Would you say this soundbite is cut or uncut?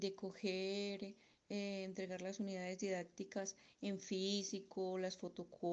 uncut